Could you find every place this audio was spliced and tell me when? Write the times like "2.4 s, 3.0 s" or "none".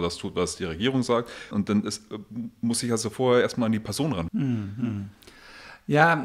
1.5 s, 4.3 s

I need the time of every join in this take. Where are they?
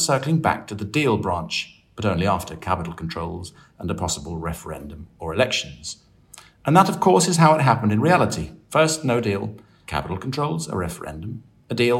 9.9 s

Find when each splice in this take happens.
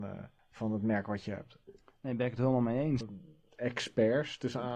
3.0 s

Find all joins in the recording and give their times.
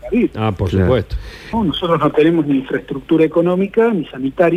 1.5 s

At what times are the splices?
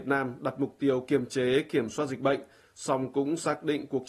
none

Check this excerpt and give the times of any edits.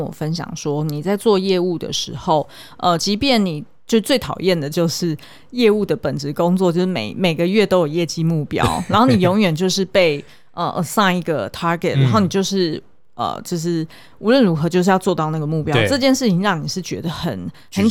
none

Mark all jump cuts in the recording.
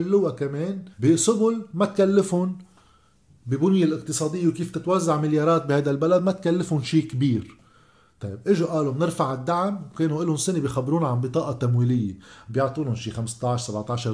0.9 s

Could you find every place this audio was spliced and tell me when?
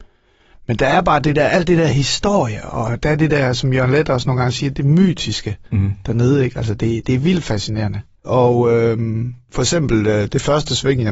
8.2 s

